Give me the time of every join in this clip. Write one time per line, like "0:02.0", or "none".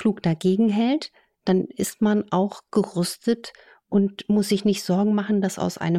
none